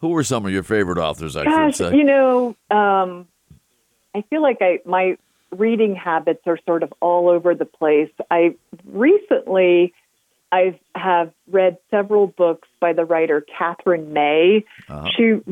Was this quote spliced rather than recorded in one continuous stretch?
no; 0 cuts

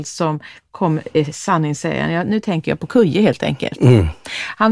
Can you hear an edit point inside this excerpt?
no; 0 cuts

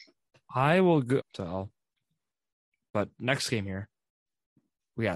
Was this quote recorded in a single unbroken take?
no; 1 cut; at 1.2 s

